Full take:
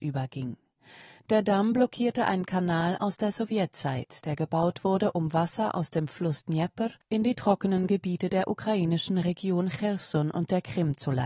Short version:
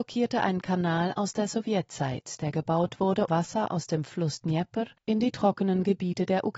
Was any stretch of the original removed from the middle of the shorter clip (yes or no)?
yes